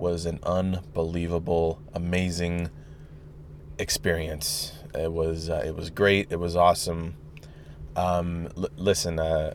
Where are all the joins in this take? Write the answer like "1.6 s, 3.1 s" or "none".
none

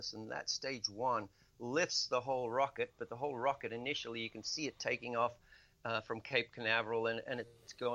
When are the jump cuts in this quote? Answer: none

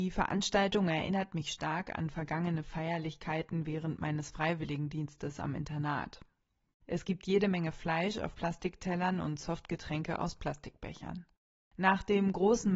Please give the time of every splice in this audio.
6.7 s

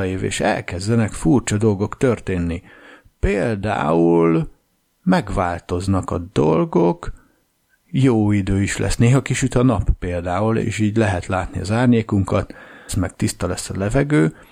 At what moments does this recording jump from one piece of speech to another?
10.6 s, 12.9 s

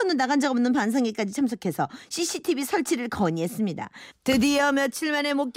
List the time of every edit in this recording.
4.1 s

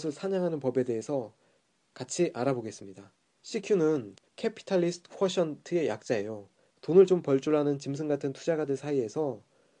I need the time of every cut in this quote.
3.2 s, 6.7 s

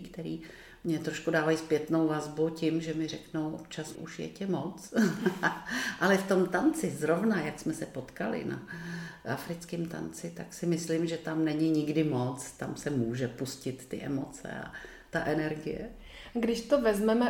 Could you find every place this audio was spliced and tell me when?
3.9 s

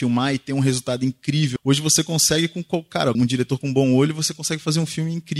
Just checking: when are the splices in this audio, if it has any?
1.6 s, 3.1 s

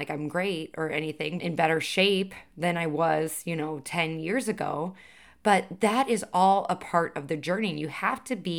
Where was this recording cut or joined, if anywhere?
1.4 s

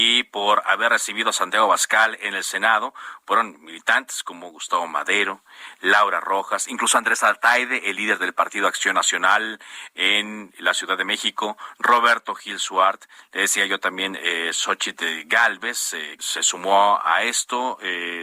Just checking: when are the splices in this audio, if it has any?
16.2 s

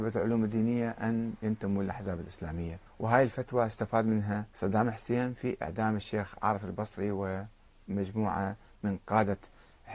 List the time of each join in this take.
2.9 s, 4.5 s

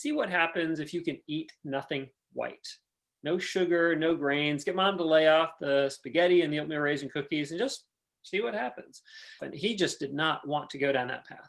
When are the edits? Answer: 9.4 s

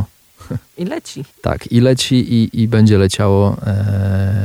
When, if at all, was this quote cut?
1.3 s

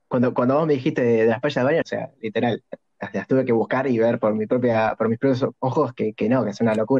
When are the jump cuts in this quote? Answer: 1.8 s

